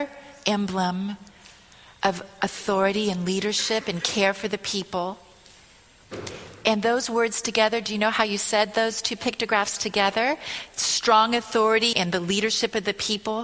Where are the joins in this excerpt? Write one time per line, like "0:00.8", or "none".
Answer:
0:11.9